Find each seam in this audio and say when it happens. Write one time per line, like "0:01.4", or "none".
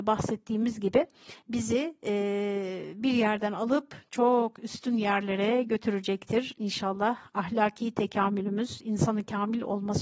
none